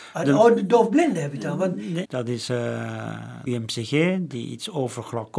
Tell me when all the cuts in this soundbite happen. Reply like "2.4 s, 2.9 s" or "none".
2.0 s, 3.5 s